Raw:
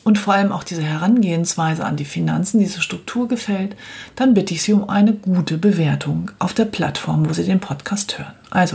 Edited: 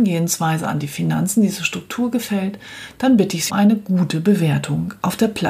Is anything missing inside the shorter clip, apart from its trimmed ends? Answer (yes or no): yes